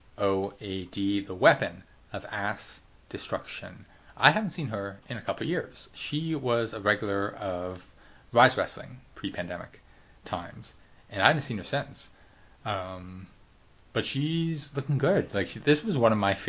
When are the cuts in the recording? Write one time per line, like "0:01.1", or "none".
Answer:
0:09.1